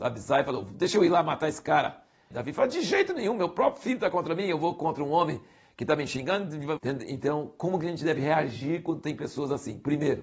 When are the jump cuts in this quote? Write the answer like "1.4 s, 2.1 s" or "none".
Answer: 2.3 s, 6.8 s